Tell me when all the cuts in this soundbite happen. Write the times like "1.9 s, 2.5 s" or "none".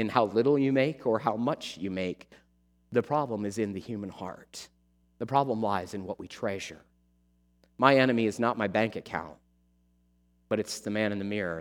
5.0 s